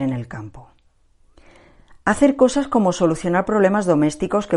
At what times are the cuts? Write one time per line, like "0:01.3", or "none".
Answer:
none